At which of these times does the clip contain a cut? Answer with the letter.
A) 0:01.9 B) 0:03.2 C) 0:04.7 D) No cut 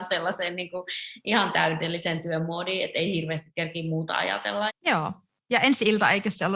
C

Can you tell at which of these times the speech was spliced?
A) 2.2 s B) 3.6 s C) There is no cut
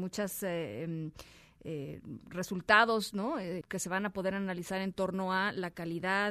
B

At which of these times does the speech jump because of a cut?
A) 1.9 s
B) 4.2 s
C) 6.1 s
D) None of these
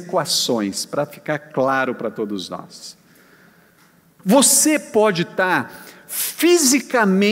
B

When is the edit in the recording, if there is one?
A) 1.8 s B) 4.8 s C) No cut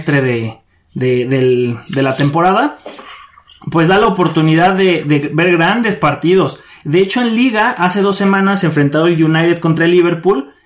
C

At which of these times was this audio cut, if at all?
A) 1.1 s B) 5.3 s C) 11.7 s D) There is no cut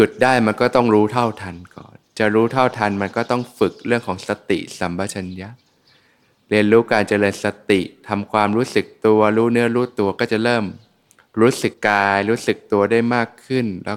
C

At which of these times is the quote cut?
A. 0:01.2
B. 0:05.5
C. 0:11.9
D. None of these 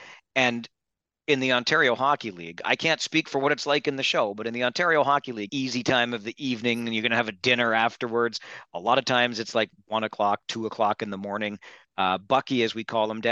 B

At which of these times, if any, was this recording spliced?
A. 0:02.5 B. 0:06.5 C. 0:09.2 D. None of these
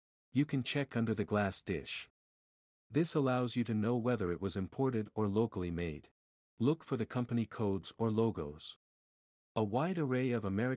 B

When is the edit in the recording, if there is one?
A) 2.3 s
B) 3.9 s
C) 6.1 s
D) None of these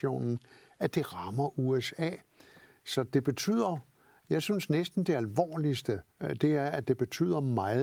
C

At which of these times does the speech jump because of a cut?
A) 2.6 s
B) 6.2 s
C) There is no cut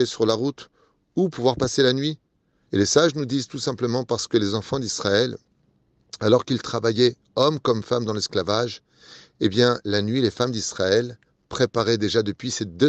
A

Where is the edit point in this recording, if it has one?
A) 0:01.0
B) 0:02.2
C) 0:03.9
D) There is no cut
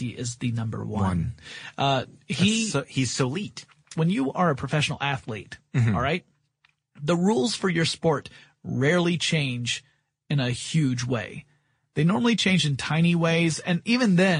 C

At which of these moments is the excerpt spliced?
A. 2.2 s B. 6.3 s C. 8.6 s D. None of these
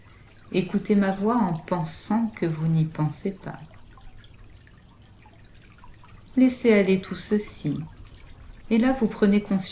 C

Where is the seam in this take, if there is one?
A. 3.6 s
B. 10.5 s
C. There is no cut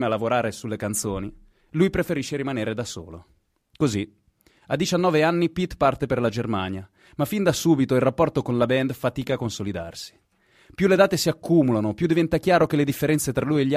A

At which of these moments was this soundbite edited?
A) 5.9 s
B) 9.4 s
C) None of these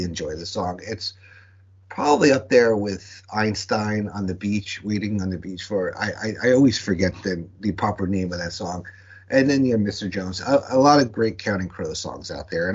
C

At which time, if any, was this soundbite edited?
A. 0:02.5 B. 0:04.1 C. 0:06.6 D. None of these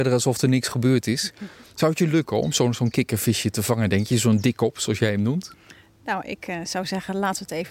D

